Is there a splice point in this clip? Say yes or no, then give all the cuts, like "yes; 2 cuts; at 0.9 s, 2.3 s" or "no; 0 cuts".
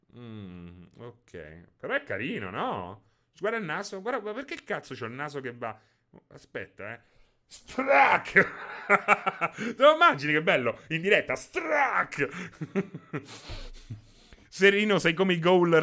yes; 1 cut; at 14.4 s